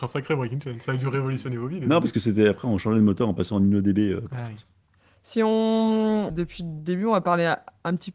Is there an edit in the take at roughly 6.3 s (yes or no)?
yes